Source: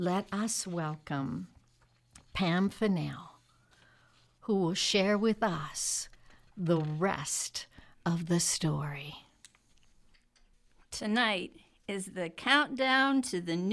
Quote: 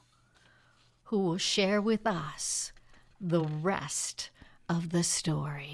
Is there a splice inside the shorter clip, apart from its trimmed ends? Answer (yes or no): no